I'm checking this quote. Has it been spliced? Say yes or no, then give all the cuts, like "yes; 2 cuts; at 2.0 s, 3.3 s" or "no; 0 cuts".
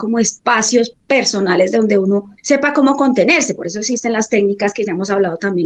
yes; 1 cut; at 2.4 s